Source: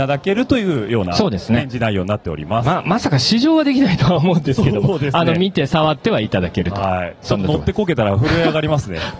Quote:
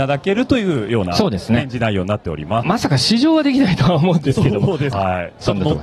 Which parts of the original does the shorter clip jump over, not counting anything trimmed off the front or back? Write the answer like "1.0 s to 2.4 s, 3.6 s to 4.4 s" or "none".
2.6 s to 2.8 s, 5.1 s to 6.7 s